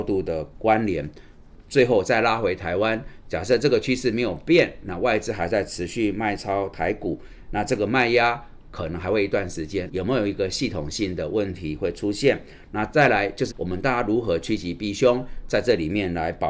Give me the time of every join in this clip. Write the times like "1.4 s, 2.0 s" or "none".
7.5 s, 9.9 s, 13.5 s